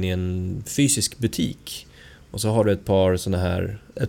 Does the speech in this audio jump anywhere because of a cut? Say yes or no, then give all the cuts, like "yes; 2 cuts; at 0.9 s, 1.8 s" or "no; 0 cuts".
no; 0 cuts